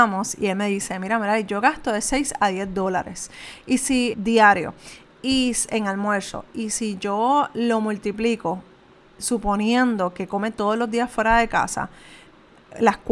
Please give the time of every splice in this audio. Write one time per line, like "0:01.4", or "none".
0:04.1